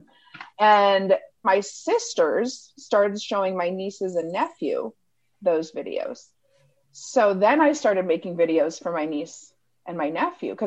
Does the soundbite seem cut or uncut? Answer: cut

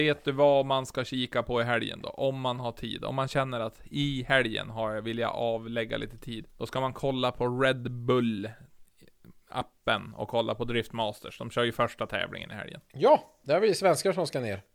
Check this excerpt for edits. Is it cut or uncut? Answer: cut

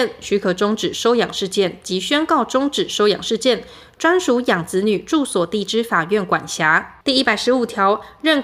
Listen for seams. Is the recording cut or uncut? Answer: cut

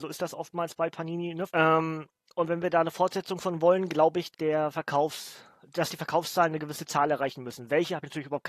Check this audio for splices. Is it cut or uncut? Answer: cut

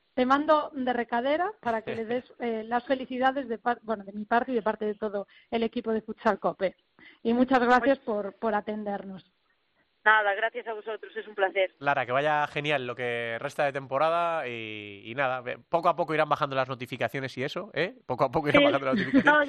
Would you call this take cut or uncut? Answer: uncut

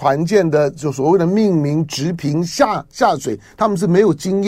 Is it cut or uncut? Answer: uncut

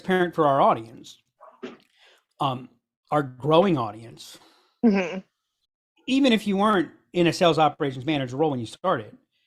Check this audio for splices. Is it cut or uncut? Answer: uncut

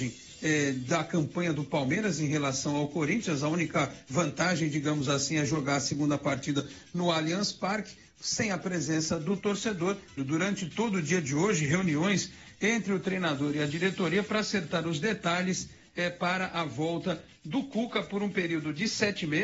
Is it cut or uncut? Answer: cut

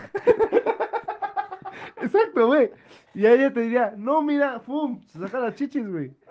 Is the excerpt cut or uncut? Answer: uncut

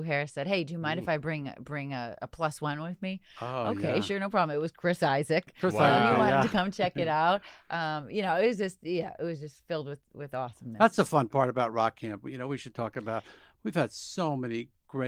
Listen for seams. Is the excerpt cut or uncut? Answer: uncut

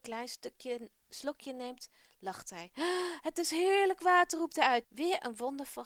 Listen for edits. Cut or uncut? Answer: cut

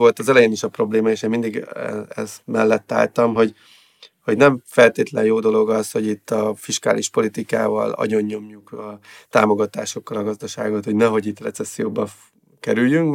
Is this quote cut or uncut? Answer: uncut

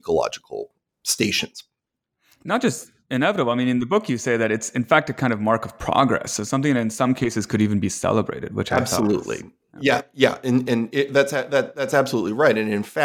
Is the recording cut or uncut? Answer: uncut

